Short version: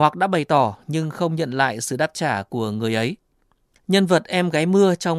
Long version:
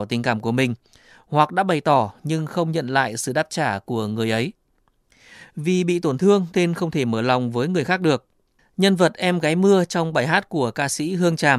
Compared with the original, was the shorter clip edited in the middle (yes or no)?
yes